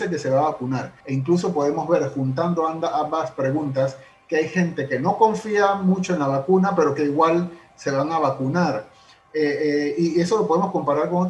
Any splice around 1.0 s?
yes; 1 cut; at 1.0 s

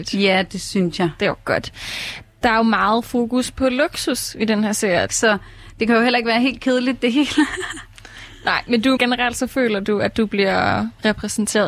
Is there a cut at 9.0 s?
yes; 2 cuts; at 5.1 s, 9.0 s

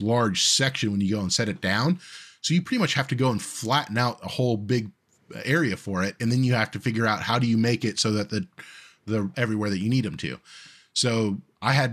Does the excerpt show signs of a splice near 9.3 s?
yes; 1 cut; at 9.3 s

